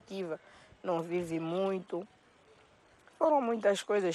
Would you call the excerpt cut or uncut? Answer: uncut